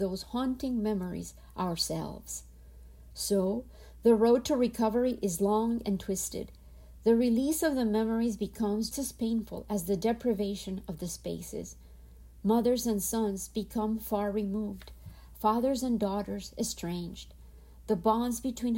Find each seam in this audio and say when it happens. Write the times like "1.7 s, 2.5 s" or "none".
8.9 s